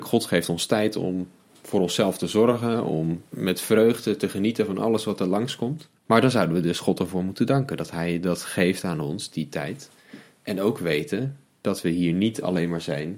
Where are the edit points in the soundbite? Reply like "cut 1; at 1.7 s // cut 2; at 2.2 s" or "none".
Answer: cut 1; at 3.3 s // cut 2; at 6.0 s